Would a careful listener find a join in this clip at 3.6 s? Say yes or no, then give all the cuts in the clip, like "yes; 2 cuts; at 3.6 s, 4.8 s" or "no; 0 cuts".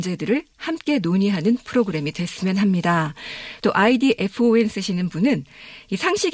yes; 1 cut; at 3.6 s